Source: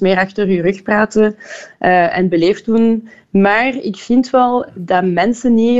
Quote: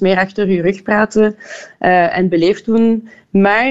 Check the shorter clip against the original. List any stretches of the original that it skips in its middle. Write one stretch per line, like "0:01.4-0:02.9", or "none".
none